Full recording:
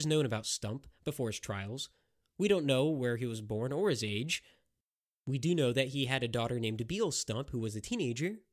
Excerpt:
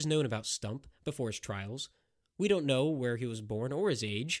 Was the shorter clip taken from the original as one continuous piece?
yes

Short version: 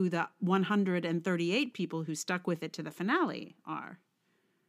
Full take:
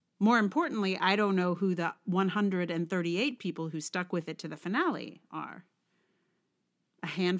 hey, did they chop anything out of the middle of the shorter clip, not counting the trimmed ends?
no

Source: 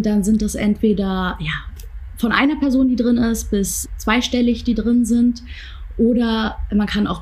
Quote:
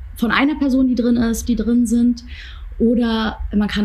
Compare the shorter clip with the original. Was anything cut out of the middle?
yes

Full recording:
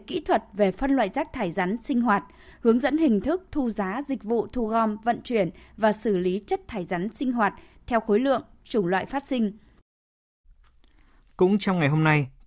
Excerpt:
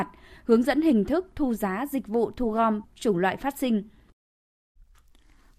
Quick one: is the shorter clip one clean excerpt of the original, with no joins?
no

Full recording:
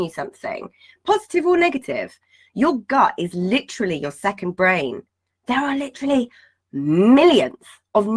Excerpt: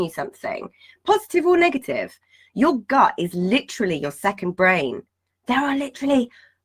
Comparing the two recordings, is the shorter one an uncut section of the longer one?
yes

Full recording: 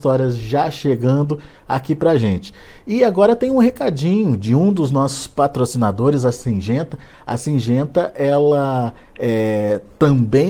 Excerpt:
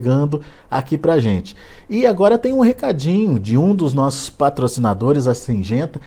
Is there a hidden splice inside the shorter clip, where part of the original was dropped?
no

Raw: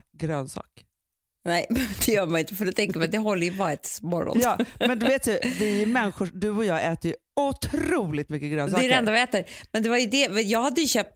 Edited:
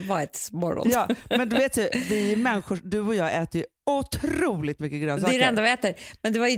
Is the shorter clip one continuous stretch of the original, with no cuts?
yes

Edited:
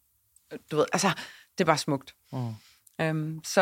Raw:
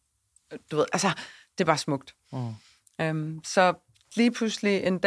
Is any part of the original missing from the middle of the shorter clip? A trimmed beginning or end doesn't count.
no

